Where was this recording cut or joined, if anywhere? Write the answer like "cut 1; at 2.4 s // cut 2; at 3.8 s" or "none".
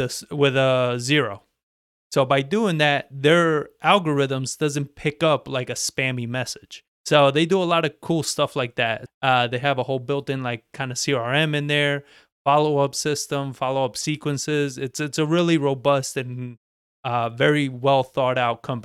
cut 1; at 6.9 s // cut 2; at 9.1 s